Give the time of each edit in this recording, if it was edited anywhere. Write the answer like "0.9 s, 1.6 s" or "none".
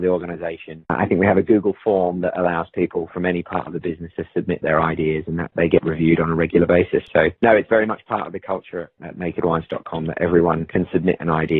none